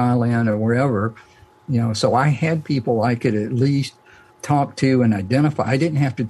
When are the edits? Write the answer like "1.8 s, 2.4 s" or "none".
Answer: 1.5 s